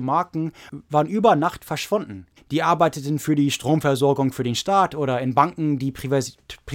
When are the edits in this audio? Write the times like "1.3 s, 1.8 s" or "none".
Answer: 2.4 s